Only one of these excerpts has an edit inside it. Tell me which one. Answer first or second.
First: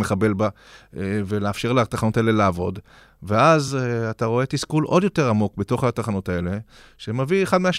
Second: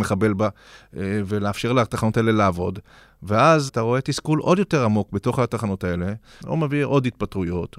second